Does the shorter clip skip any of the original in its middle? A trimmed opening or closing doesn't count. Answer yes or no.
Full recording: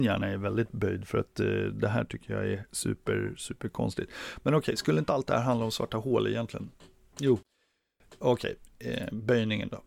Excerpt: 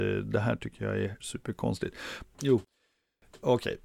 yes